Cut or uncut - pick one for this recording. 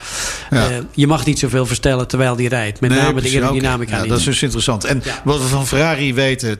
uncut